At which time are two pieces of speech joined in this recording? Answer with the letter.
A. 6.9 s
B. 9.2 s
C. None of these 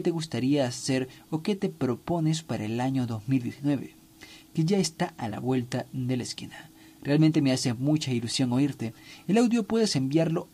C